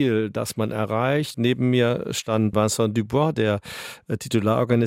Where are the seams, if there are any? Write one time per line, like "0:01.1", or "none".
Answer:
0:01.3
0:02.5